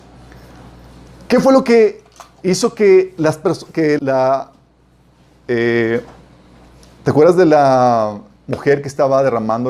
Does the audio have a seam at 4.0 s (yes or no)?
yes